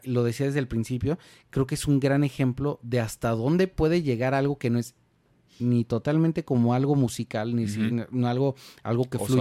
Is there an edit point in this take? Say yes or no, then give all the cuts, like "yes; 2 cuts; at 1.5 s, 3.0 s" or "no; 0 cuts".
no; 0 cuts